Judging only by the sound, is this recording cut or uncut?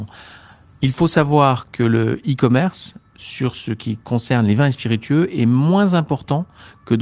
uncut